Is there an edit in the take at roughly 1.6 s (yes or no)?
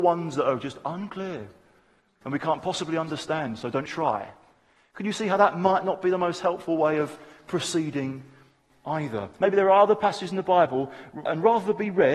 no